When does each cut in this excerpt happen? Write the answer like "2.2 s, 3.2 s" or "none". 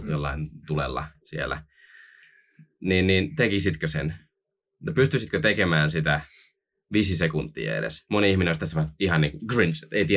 none